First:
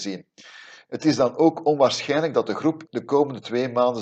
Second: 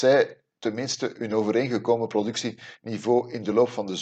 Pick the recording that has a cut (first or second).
first